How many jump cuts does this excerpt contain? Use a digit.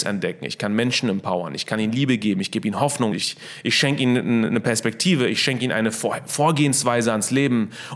1